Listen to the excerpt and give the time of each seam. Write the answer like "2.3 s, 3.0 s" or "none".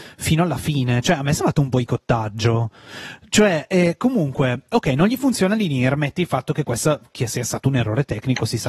none

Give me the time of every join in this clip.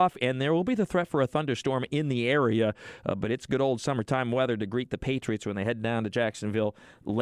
none

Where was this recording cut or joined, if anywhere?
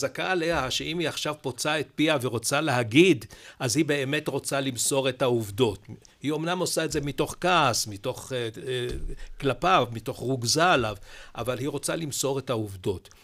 none

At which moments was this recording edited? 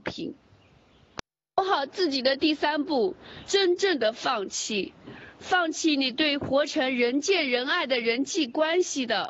3.5 s

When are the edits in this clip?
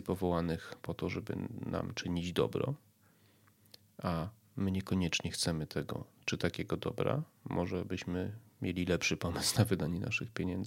none

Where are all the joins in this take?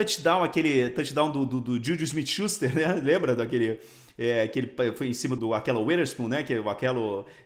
5.4 s

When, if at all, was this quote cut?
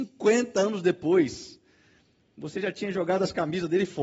none

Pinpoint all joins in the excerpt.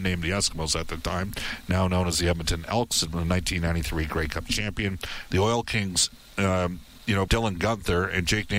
5.3 s, 7.3 s

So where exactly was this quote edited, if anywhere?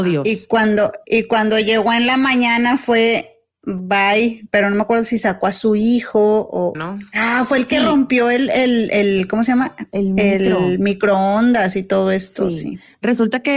6.7 s

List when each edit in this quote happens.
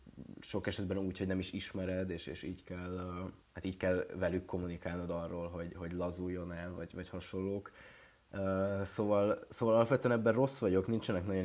3.4 s

